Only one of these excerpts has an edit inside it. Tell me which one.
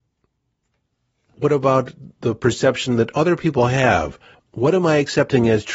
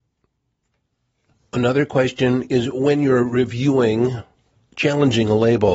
first; 2 cuts; at 1.3 s, 4.3 s

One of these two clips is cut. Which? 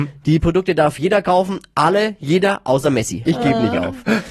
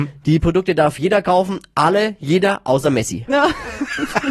first; 1 cut; at 3.3 s

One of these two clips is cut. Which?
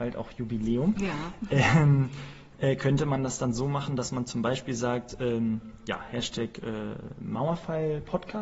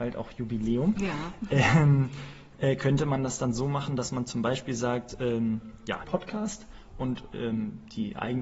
second; 1 cut; at 6.0 s

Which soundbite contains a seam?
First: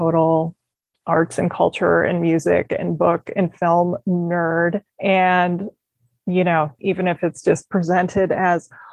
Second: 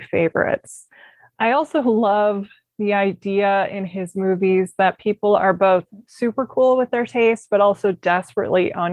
first; 2 cuts; at 4.9 s, 6.8 s

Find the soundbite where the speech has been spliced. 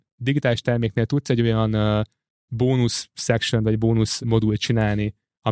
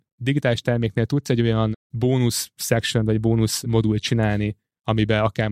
second; 1 cut; at 1.7 s

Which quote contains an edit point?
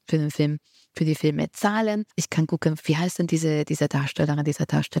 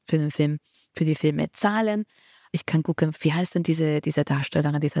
first; 1 cut; at 2.1 s

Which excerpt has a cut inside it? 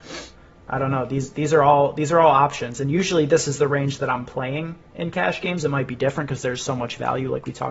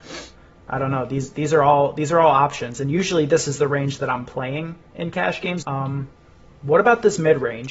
second; 1 cut; at 5.6 s

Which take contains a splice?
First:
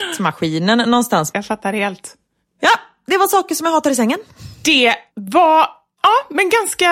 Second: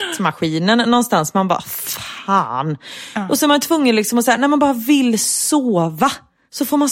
first; 1 cut; at 1.3 s

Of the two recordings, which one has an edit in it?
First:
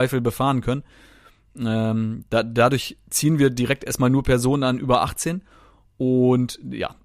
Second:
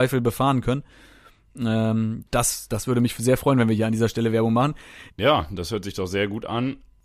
second; 2 cuts; at 2.3 s, 5.1 s

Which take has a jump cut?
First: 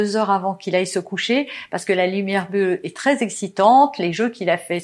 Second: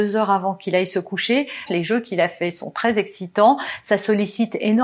second; 1 cut; at 1.7 s

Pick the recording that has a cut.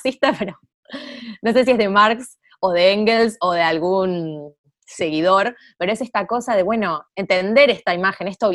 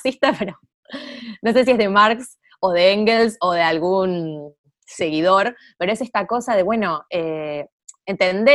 first; 1 cut; at 7.1 s

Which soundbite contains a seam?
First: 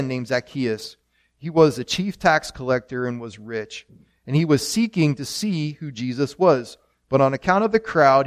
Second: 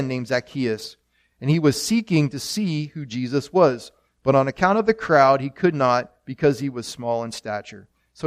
second; 1 cut; at 1.3 s

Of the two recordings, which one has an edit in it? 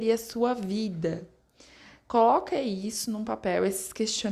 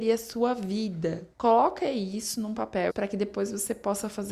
second; 2 cuts; at 1.3 s, 2.9 s

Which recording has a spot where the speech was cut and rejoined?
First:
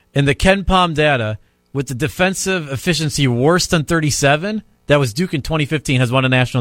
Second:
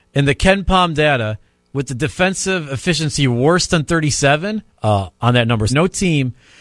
second; 2 cuts; at 4.7 s, 5.7 s

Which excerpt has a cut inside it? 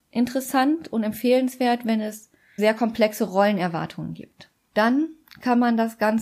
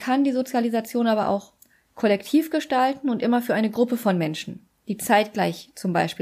first; 2 cuts; at 2.6 s, 4.7 s

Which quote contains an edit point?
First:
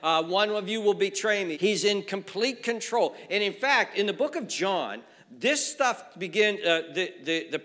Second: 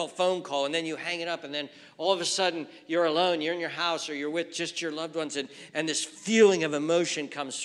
first; 1 cut; at 1.5 s

